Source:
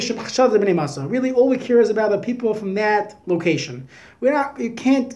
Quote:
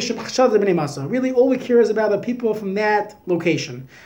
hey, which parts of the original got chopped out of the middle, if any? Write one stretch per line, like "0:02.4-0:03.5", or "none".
none